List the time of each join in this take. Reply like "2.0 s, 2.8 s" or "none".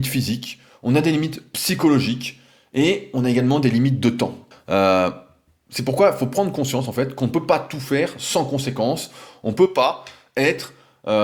4.5 s